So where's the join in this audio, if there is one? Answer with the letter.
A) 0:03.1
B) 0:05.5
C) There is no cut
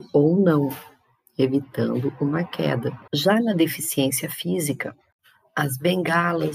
A